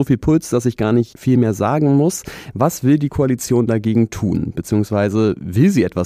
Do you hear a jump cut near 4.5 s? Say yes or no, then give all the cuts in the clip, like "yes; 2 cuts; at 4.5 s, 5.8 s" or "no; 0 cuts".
no; 0 cuts